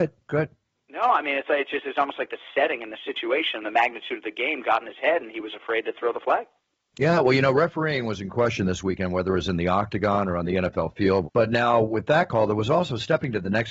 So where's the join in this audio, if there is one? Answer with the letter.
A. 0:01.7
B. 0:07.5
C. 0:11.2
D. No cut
C